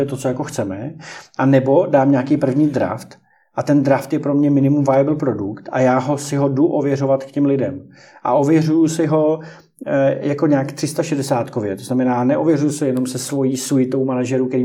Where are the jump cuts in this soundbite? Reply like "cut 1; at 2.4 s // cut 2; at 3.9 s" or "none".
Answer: none